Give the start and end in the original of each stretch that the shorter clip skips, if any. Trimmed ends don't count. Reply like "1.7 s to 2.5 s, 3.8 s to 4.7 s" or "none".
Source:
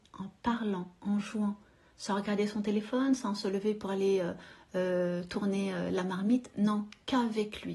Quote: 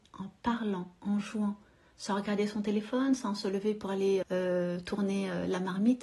4.2 s to 4.7 s